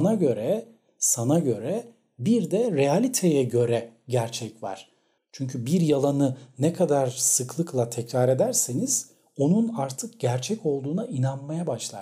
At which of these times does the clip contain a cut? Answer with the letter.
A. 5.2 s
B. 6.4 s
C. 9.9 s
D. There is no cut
A